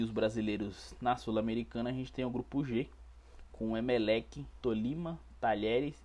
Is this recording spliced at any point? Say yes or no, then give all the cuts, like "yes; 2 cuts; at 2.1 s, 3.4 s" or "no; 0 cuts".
yes; 1 cut; at 4.6 s